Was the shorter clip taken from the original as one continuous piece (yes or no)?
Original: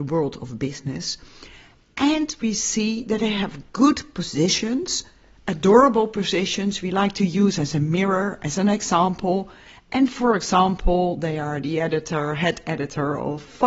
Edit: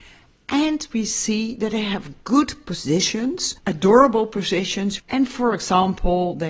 no